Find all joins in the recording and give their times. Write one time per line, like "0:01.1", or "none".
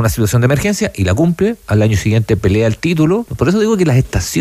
0:03.3